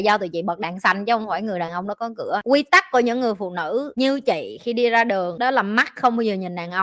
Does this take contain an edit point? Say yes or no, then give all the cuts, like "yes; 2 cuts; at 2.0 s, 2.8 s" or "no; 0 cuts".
no; 0 cuts